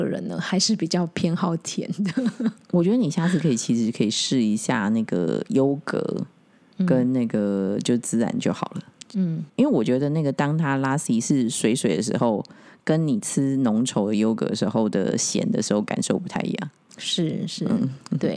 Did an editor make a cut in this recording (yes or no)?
yes